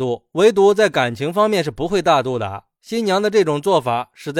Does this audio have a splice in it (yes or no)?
no